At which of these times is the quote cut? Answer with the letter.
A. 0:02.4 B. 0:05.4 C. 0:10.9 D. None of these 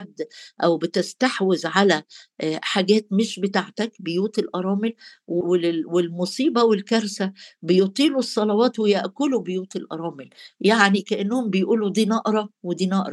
B